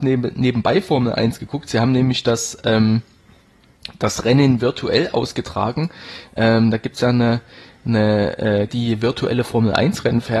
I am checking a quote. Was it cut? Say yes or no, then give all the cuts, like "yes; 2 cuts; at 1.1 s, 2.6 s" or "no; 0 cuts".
yes; 1 cut; at 8.7 s